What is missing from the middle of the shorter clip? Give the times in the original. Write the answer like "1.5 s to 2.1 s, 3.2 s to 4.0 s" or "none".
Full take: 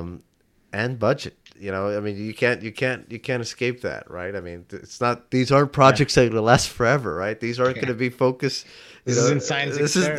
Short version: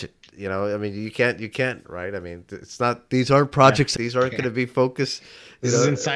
3.1 s to 4.0 s, 6.2 s to 7.4 s